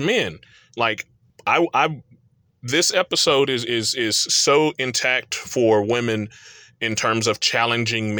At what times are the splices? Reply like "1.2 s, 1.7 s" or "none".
none